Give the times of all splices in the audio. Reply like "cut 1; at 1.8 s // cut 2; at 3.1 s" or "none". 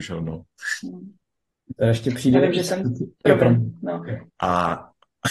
cut 1; at 3.2 s // cut 2; at 4.3 s